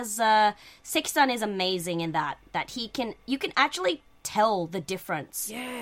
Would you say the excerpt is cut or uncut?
uncut